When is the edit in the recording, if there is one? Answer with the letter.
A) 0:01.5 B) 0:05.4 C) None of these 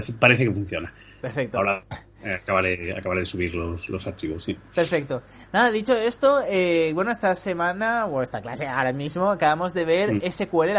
C